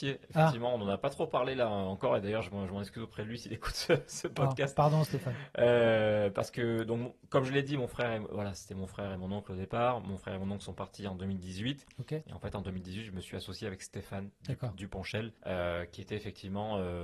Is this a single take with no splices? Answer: no; 1 cut; at 15.4 s

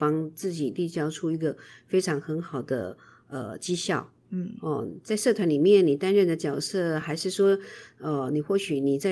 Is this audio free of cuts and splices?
yes; 0 cuts

